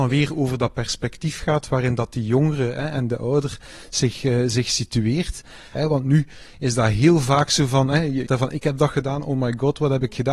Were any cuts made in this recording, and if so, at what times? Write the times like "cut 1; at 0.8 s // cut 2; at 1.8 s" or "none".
cut 1; at 5.8 s // cut 2; at 8.3 s